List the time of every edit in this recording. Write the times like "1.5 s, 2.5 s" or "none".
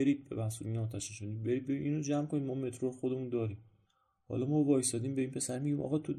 none

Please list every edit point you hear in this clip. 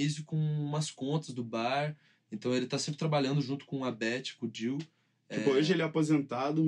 none

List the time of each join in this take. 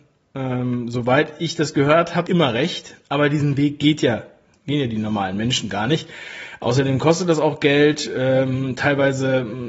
2.3 s

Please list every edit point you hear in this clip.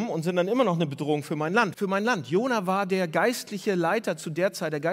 1.7 s

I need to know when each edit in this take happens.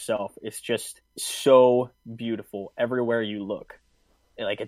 1.1 s

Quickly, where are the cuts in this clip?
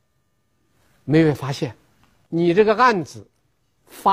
2.3 s

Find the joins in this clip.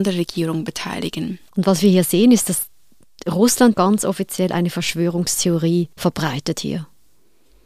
1.5 s, 3.7 s, 5.9 s

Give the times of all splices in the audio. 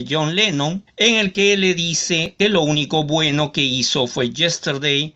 none

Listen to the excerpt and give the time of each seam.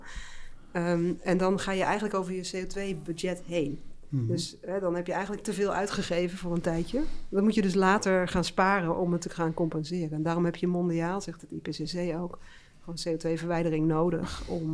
none

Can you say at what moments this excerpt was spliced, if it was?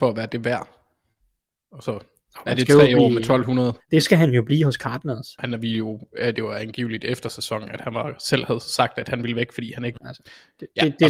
3.8 s, 5.4 s, 10.0 s

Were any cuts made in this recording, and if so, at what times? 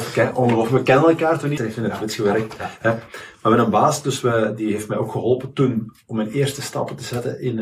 1.6 s

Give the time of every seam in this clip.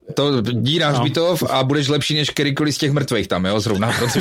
none

